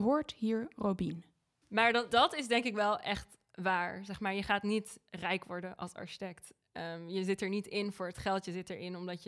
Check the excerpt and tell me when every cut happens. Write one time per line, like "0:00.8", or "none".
0:02.1